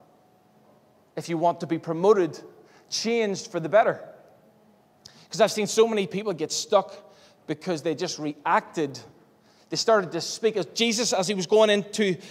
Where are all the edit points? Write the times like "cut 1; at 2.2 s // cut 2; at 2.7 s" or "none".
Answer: none